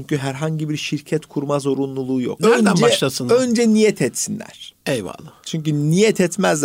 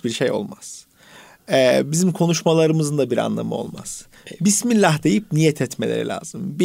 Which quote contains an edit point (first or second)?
first